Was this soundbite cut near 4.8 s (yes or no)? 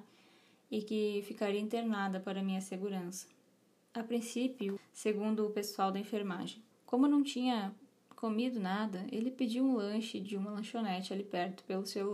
yes